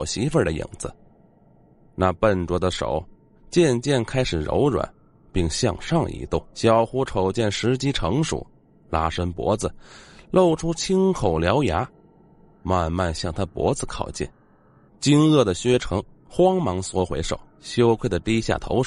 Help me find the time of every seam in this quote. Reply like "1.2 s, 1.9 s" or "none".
6.5 s, 14.9 s, 17.5 s